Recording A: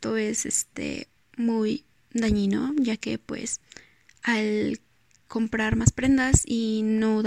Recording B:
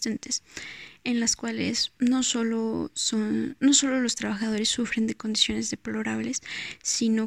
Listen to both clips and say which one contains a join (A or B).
A